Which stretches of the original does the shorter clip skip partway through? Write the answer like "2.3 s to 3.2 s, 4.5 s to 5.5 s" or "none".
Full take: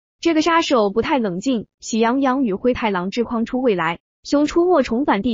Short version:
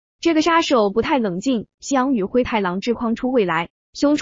1.9 s to 2.2 s